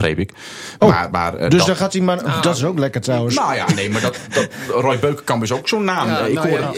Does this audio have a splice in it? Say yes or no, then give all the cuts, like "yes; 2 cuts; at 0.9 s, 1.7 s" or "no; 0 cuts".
no; 0 cuts